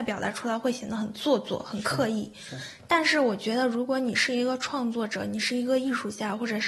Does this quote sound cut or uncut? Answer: uncut